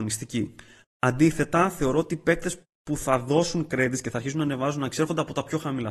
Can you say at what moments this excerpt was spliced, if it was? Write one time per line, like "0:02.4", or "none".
none